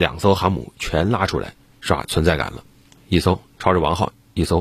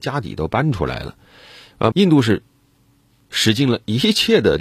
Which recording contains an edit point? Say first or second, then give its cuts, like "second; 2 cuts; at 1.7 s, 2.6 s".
second; 1 cut; at 1.9 s